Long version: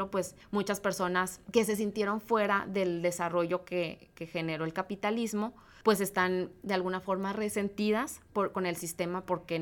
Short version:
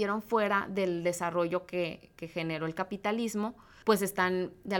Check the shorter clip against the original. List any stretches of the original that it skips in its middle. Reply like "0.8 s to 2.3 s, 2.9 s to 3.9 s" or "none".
none